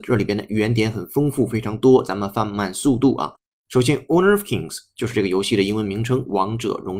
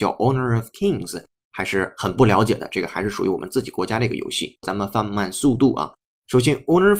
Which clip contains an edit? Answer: second; 1 cut; at 4.6 s

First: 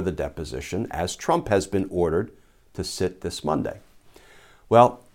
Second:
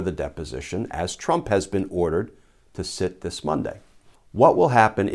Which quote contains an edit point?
second; 1 cut; at 4.1 s

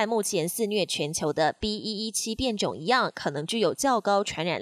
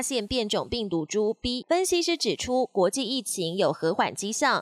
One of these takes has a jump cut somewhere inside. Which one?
second; 1 cut; at 1.6 s

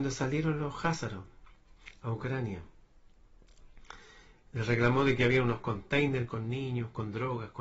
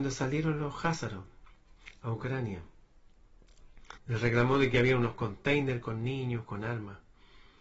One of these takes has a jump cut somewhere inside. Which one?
second; 2 cuts; at 4.0 s, 6.4 s

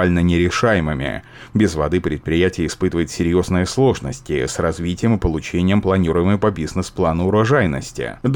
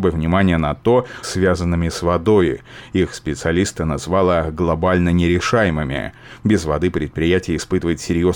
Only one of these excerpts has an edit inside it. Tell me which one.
second; 1 cut; at 1.2 s

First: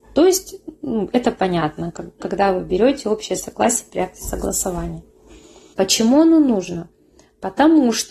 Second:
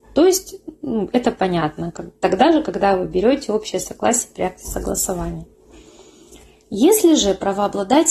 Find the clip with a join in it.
first; 2 cuts; at 2.2 s, 5.7 s

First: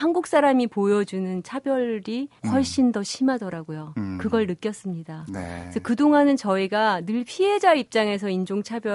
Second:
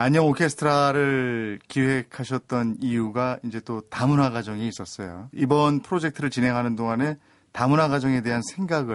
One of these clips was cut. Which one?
first; 1 cut; at 2.4 s

